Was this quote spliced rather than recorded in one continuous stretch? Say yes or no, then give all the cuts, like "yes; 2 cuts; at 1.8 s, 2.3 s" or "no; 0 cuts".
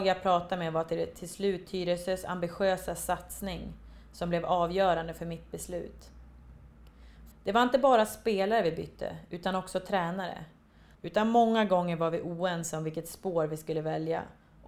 yes; 2 cuts; at 7.3 s, 10.9 s